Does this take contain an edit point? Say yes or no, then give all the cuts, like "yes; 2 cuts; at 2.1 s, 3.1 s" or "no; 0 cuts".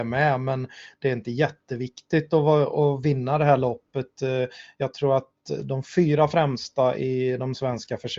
no; 0 cuts